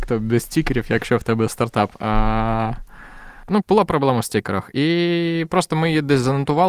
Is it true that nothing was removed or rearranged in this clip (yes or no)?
no